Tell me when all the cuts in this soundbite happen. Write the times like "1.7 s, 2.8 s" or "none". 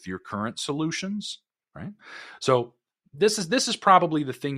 1.6 s